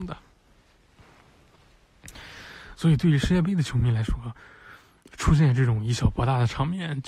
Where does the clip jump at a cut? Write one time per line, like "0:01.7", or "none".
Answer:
none